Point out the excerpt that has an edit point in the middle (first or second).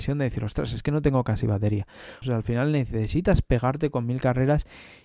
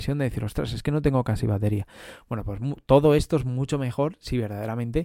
first